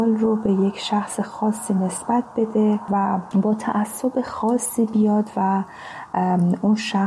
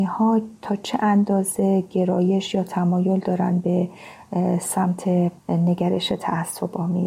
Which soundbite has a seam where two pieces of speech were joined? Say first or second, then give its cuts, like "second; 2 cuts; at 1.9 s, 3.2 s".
second; 1 cut; at 5.4 s